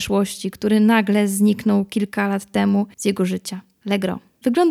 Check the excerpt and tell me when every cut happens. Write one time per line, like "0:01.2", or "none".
none